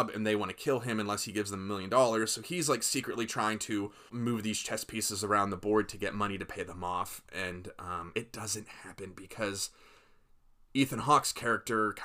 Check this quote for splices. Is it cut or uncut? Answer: cut